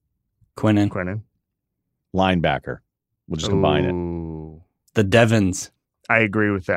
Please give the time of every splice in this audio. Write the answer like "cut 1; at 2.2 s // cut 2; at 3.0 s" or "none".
none